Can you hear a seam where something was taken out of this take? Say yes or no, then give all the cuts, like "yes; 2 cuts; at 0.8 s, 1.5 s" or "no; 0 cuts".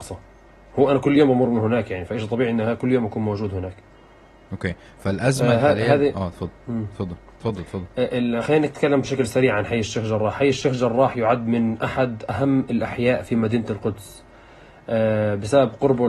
no; 0 cuts